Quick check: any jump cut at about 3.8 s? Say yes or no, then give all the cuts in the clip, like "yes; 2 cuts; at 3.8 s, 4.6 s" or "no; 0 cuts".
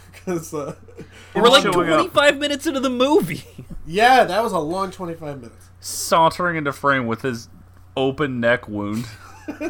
no; 1 cut; at 1.3 s